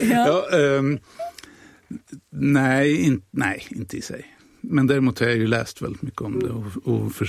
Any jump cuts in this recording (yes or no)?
no